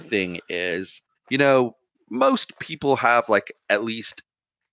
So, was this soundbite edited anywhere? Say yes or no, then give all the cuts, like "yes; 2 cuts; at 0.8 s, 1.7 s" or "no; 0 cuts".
no; 0 cuts